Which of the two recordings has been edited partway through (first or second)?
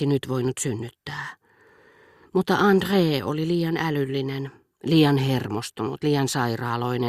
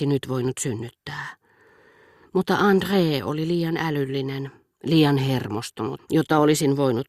second